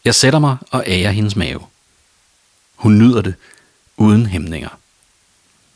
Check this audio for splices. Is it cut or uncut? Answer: uncut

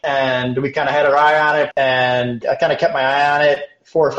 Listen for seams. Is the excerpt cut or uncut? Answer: cut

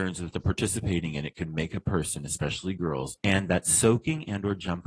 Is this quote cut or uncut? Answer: cut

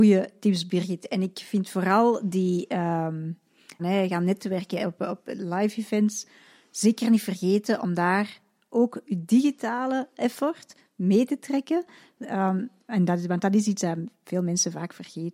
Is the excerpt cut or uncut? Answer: cut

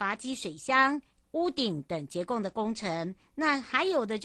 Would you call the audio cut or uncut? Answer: cut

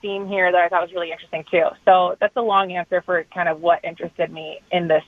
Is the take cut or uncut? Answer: uncut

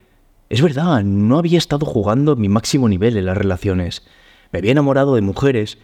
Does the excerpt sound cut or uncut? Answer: uncut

